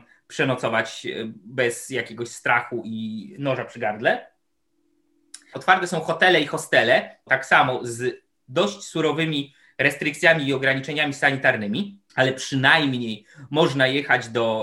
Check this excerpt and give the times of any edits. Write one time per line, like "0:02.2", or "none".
0:05.5
0:07.3
0:12.1